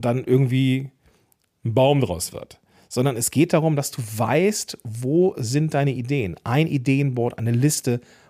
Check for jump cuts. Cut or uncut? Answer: uncut